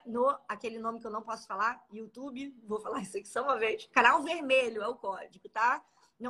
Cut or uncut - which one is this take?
uncut